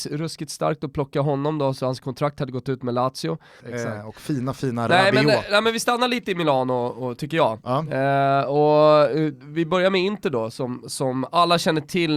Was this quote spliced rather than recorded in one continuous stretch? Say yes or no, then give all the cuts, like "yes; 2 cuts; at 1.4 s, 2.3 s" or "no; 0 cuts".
yes; 1 cut; at 3.6 s